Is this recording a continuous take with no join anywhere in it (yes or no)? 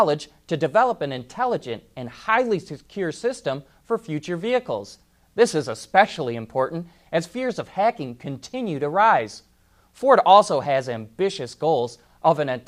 yes